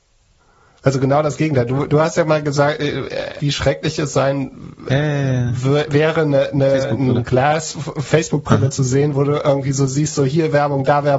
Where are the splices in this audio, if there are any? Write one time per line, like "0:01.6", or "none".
0:03.4